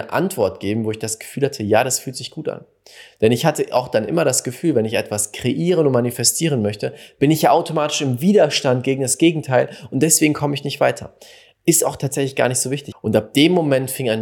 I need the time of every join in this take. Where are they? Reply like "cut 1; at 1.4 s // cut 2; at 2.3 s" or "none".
cut 1; at 12.9 s